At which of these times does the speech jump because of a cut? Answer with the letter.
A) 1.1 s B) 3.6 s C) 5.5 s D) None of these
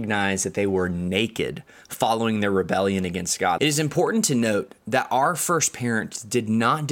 B